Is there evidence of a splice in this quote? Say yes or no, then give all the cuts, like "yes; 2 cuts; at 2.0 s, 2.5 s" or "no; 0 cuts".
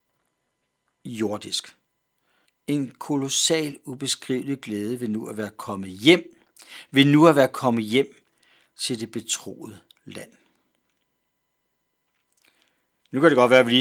yes; 1 cut; at 2.5 s